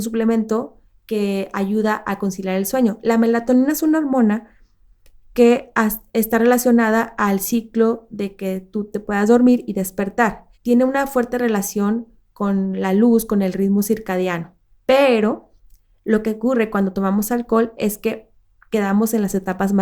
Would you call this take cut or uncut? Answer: cut